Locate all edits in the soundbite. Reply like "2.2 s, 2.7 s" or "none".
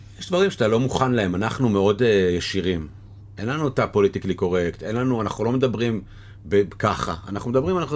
none